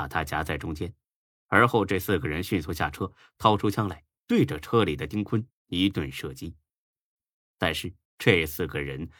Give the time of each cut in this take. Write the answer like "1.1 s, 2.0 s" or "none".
8.0 s